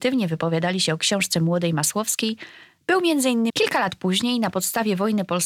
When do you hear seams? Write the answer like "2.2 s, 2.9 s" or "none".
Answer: 3.5 s